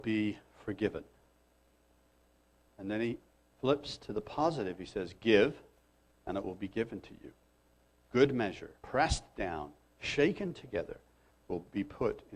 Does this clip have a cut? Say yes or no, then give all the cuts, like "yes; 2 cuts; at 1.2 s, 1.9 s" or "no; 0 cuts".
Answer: yes; 2 cuts; at 8.8 s, 11.3 s